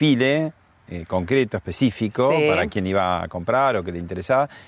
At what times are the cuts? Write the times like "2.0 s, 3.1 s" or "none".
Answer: none